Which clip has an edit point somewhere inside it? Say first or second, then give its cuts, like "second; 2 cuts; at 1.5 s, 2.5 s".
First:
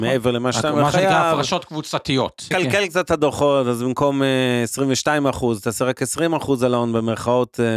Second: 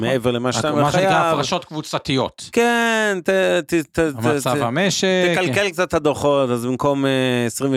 first; 1 cut; at 2.5 s